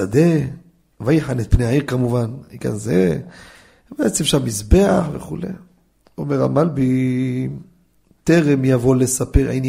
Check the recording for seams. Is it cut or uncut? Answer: uncut